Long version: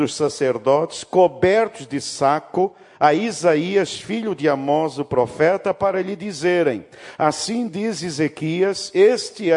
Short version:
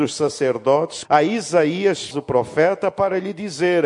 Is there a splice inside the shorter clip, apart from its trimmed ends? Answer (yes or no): yes